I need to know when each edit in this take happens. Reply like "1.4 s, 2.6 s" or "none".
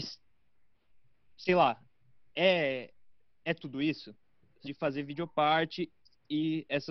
4.6 s

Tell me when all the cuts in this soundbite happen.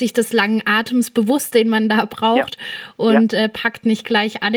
none

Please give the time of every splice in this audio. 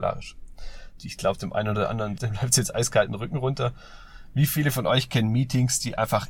1.0 s, 2.2 s

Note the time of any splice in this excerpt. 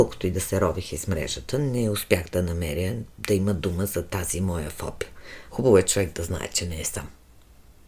5.5 s

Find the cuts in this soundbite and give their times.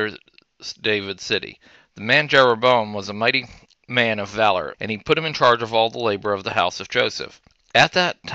4.7 s

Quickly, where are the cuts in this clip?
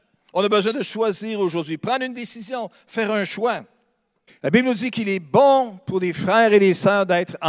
4.3 s

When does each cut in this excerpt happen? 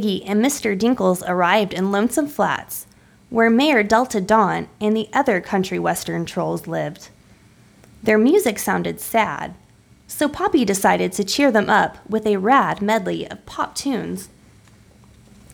none

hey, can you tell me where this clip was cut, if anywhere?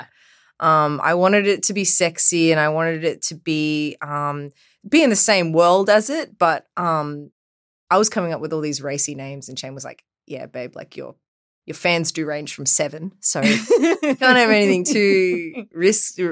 none

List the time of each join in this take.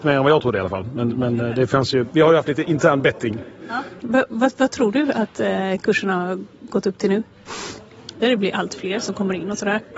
4.0 s, 8.2 s

